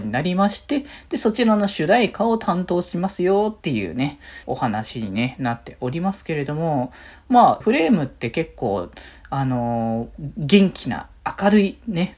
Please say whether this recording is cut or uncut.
cut